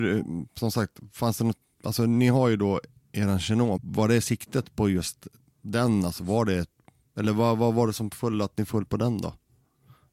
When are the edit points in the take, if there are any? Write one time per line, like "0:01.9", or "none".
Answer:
0:03.8